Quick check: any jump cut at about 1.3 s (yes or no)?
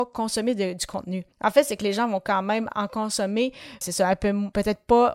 yes